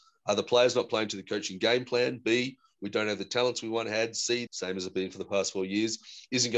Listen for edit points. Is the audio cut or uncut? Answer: cut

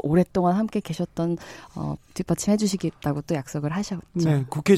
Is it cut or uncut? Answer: cut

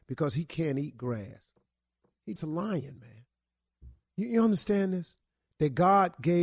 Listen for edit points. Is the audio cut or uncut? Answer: cut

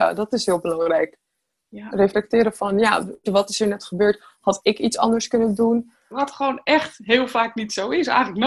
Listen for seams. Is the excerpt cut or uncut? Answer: cut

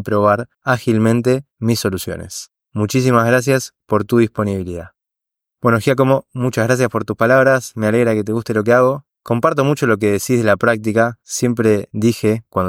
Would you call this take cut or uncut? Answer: uncut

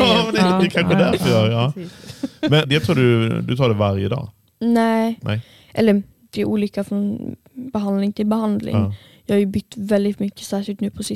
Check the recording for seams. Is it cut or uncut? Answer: cut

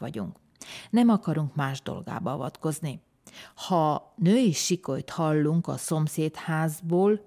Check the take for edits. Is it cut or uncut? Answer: uncut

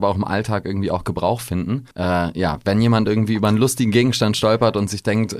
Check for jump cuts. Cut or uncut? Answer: cut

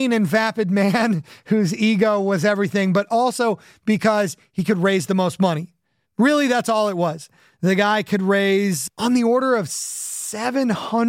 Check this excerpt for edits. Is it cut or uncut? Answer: cut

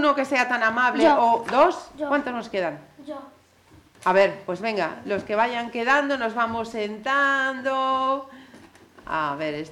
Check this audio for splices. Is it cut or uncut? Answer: uncut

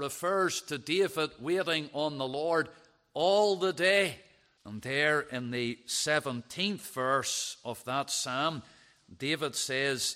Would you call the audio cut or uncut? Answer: cut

